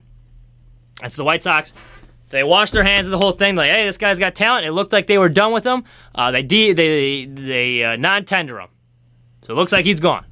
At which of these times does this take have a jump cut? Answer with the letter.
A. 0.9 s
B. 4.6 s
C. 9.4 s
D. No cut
D